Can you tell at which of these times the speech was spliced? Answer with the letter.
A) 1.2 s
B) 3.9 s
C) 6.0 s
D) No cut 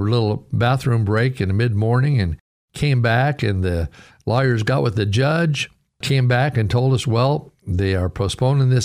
C